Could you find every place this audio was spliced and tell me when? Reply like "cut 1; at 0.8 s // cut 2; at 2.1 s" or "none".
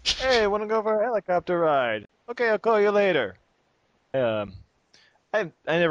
cut 1; at 2.1 s // cut 2; at 4.1 s